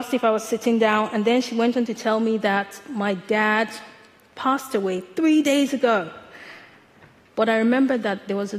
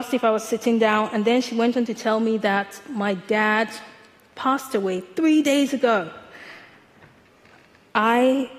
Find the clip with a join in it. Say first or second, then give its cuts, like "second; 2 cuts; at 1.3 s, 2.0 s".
first; 1 cut; at 7.3 s